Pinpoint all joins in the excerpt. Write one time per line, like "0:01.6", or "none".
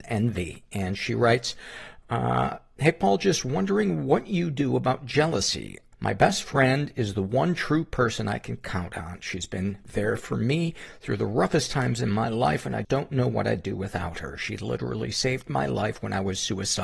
0:05.9
0:12.8